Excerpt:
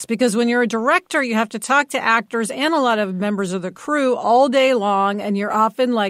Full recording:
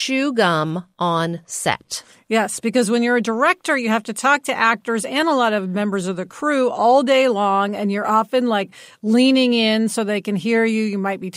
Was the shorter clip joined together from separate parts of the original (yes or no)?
no